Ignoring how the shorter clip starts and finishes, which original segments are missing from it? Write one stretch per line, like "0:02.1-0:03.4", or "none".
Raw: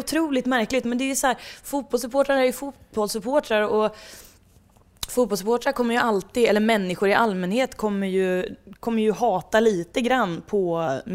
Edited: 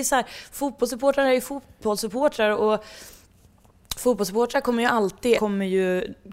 0:06.5-0:07.8

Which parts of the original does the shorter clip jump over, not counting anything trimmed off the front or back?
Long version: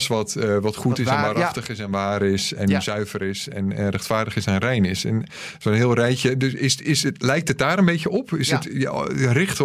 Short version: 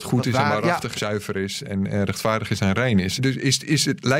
0:01.7-0:02.8
0:05.0-0:06.3

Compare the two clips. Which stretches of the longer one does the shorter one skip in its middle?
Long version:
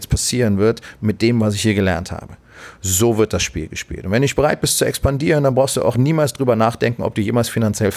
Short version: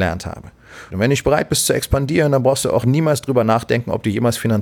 0:02.8-0:04.0

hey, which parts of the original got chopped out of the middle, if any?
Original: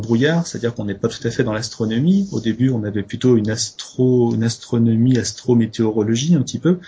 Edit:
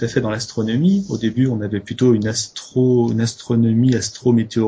none

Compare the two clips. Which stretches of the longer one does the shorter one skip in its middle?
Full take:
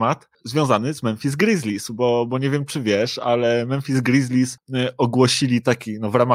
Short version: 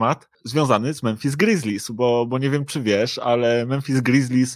none

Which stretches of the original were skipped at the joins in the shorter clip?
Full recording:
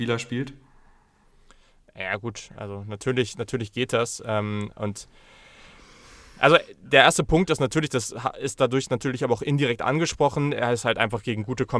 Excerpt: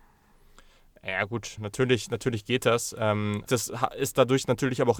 0:02.5-0:02.8
0:04.7-0:07.9

